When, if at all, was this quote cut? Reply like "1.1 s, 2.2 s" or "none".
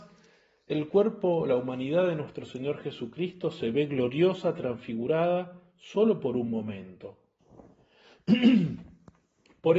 7.4 s

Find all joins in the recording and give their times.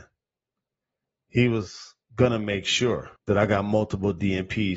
2.0 s, 3.2 s

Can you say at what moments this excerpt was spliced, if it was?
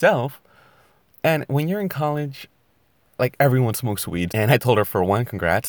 4.3 s

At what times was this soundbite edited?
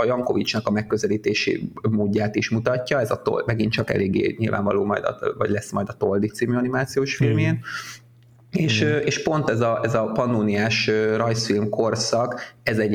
none

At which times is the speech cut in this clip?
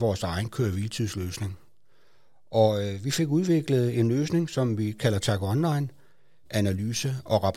6.4 s

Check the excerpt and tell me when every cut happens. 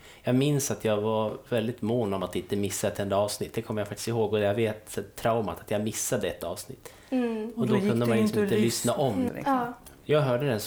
9.3 s

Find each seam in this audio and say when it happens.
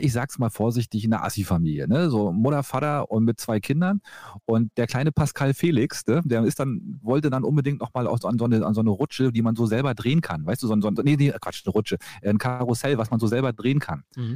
11.0 s

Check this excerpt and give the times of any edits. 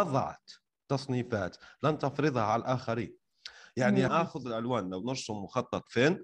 4.1 s

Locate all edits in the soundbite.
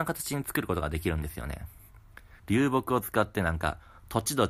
2.4 s

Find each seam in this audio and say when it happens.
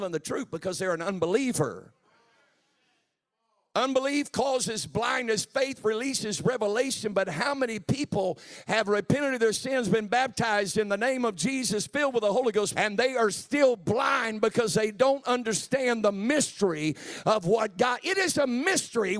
12.7 s

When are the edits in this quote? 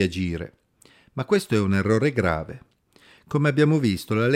none

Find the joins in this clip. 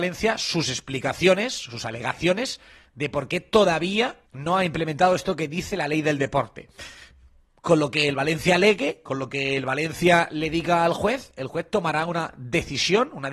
4.3 s

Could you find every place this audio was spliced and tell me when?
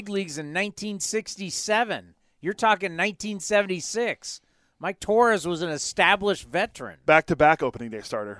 none

